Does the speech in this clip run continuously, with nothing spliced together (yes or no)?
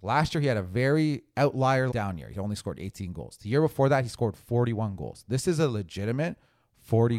no